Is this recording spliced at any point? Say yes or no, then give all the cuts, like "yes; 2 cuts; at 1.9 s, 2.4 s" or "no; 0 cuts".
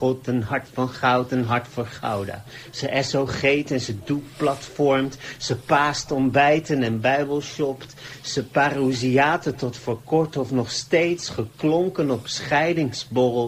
no; 0 cuts